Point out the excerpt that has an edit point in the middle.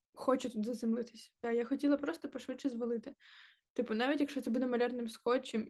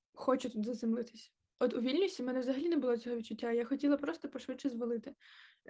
first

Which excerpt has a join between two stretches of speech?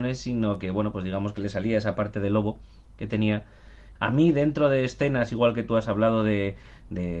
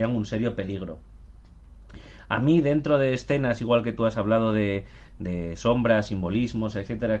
first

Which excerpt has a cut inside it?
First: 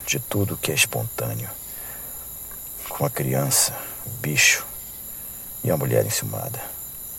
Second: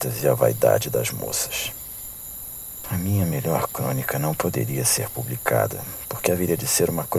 second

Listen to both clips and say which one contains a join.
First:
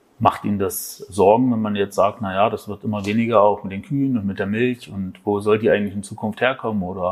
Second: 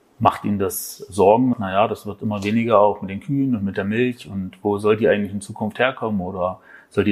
second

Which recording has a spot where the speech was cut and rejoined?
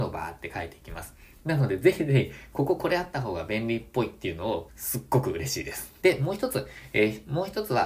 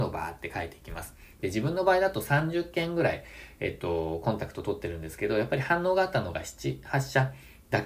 first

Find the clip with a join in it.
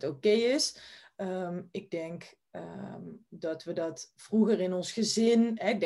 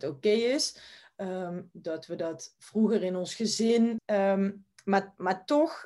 second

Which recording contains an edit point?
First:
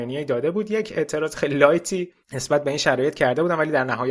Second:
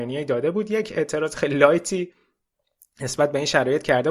first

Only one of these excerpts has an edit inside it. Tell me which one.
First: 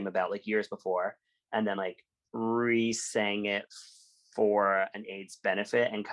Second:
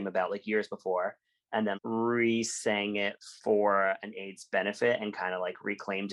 second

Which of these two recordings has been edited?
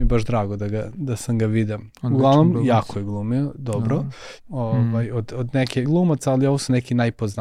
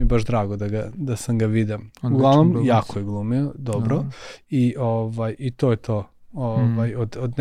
first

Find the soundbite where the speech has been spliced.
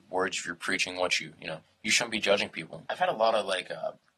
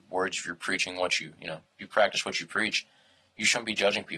first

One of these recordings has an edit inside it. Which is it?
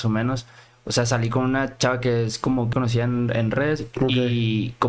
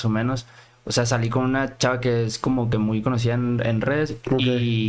first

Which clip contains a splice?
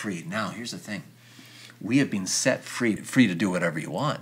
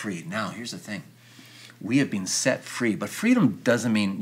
first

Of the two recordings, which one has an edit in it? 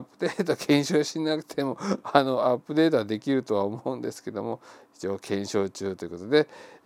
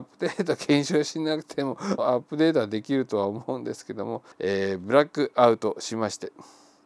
second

